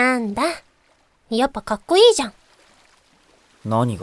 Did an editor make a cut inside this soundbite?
no; 0 cuts

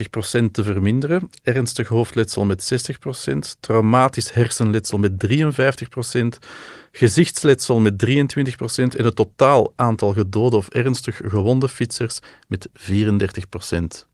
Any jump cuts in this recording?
no; 0 cuts

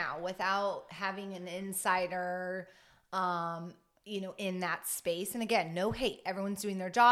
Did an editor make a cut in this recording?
no; 0 cuts

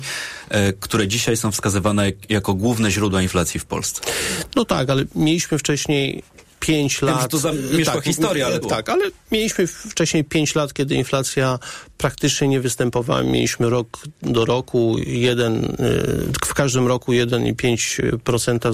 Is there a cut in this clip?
yes; 1 cut; at 8.6 s

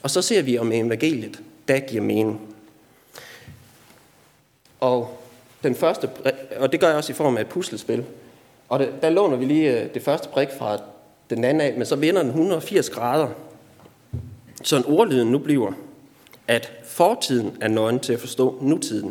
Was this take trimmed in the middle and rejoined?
no; 0 cuts

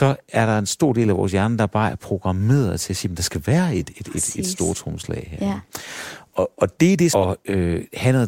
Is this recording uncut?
no; 1 cut; at 7.1 s

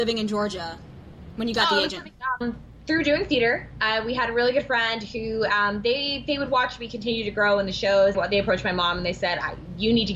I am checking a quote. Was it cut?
yes; 2 cuts; at 2.4 s, 8.1 s

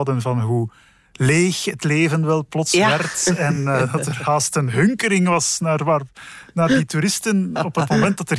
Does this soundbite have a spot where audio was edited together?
no; 0 cuts

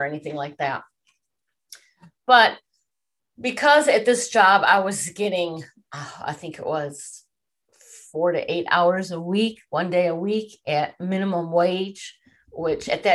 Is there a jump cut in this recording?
no; 0 cuts

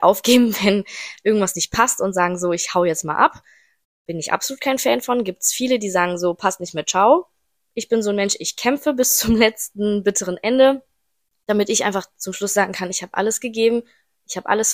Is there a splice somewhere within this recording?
no; 0 cuts

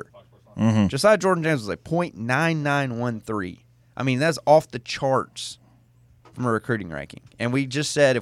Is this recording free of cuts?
yes; 0 cuts

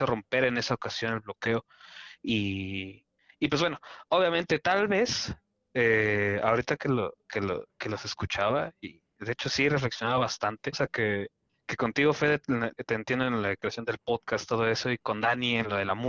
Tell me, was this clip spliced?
yes; 3 cuts; at 4.6 s, 10.7 s, 12.8 s

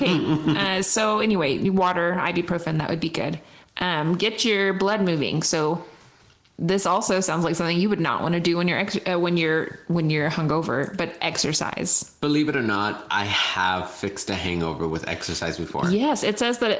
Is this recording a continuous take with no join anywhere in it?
yes; 0 cuts

